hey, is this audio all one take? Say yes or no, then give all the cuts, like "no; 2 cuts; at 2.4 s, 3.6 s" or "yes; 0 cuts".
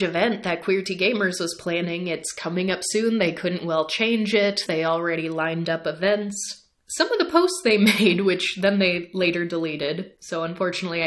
no; 1 cut; at 4.7 s